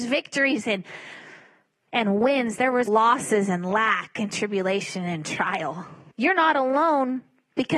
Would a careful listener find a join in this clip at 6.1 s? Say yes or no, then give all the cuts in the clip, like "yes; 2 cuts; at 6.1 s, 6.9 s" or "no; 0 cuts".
yes; 2 cuts; at 2.9 s, 6.1 s